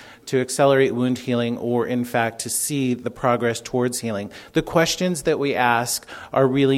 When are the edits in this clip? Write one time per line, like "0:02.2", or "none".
none